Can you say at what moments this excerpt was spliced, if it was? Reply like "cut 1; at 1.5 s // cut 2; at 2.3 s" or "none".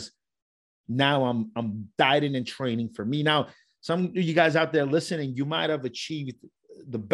none